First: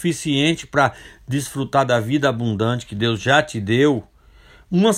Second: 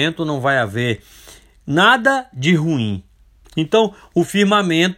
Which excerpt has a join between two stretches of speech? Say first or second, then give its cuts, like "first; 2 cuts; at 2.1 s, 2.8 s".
second; 1 cut; at 3.4 s